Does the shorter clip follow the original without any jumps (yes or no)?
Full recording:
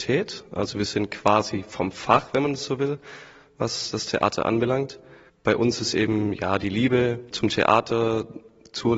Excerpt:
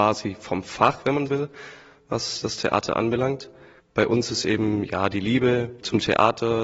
no